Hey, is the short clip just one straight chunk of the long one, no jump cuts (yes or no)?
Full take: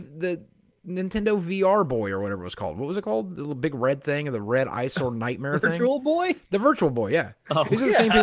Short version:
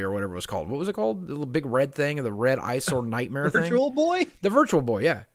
yes